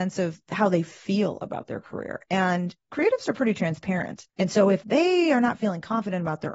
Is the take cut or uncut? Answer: uncut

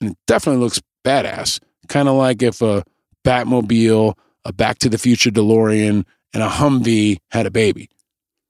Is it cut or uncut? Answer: uncut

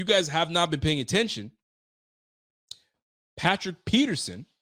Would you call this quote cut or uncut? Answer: uncut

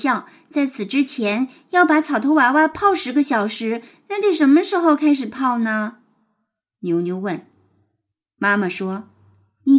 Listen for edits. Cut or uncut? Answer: uncut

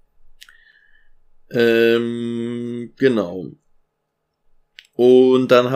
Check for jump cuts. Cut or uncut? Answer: uncut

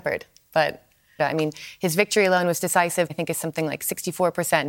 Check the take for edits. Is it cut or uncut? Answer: cut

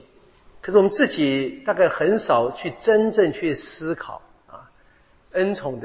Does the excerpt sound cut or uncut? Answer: uncut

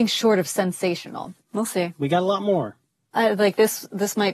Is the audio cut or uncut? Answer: cut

